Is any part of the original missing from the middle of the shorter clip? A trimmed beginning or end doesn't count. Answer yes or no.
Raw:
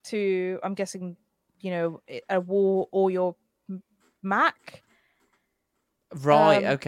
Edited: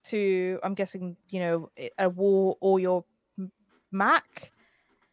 yes